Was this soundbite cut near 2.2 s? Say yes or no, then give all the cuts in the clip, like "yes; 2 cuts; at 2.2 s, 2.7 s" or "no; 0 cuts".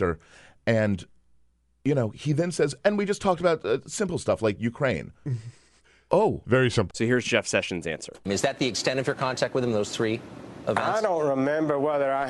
no; 2 cuts; at 6.9 s, 8.3 s